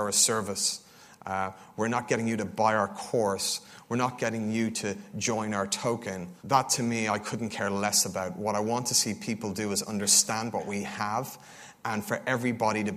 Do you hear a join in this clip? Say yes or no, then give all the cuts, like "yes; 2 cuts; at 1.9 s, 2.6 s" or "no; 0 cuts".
yes; 1 cut; at 6.4 s